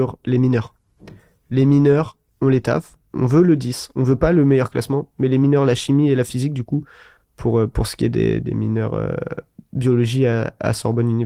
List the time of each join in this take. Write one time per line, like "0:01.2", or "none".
none